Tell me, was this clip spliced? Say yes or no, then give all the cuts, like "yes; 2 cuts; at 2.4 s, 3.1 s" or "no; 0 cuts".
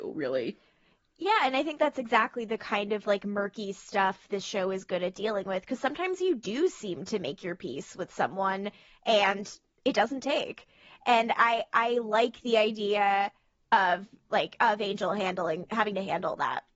no; 0 cuts